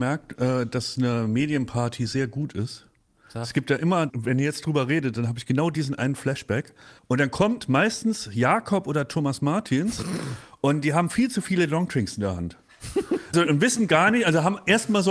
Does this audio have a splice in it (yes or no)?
yes